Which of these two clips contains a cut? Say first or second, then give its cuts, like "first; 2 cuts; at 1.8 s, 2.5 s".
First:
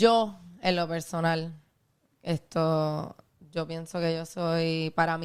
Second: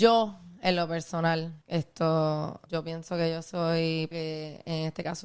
second; 3 cuts; at 1.6 s, 2.7 s, 4.1 s